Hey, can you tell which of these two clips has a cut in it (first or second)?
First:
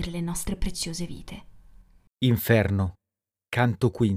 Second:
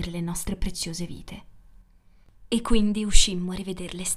first